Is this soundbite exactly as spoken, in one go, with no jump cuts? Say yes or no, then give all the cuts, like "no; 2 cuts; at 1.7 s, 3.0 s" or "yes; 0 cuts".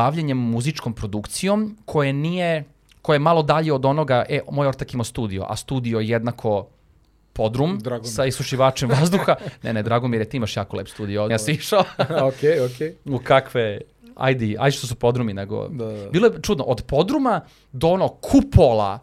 no; 2 cuts; at 9.8 s, 11.3 s